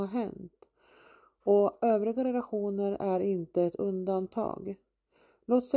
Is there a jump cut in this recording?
no; 0 cuts

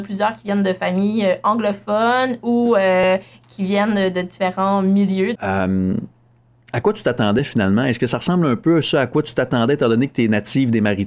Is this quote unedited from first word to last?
no; 1 cut; at 5.4 s

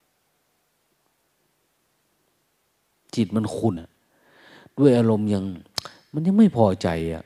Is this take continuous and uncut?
no; 1 cut; at 3.8 s

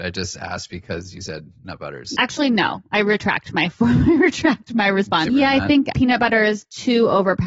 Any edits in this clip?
yes; 2 cuts; at 2.1 s, 5.3 s

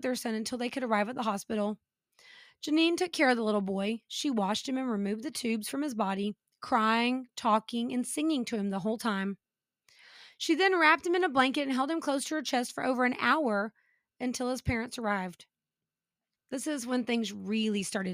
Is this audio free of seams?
no; 1 cut; at 16.4 s

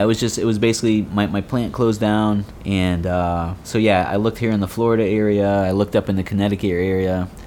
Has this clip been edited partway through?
no; 0 cuts

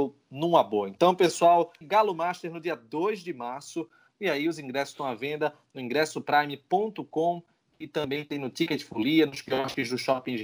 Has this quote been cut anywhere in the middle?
yes; 1 cut; at 1.8 s

